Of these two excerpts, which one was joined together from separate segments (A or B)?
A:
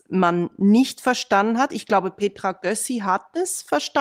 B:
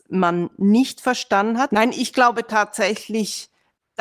B